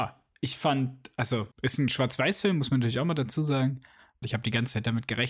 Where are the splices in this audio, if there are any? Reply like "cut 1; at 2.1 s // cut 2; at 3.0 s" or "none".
cut 1; at 1.5 s // cut 2; at 4.2 s